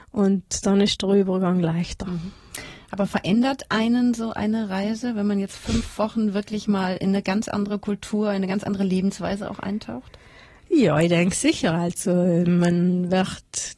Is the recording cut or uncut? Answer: uncut